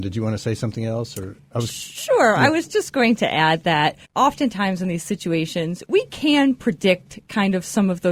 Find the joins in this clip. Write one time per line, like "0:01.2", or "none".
0:04.0